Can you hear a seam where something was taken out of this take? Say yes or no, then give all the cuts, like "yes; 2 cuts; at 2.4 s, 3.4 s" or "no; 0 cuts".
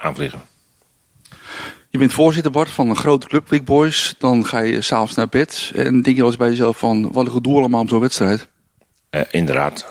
no; 0 cuts